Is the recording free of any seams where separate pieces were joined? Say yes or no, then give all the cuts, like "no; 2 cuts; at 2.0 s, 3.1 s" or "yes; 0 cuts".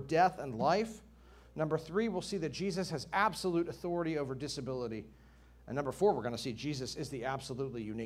yes; 0 cuts